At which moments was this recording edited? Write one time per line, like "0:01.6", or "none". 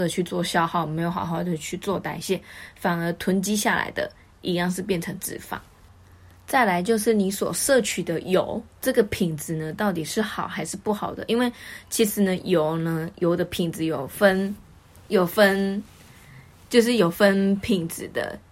0:08.7